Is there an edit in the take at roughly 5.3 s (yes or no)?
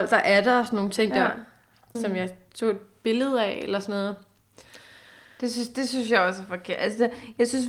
no